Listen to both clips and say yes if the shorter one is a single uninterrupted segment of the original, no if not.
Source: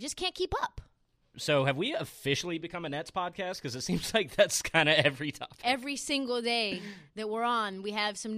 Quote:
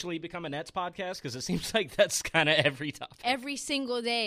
yes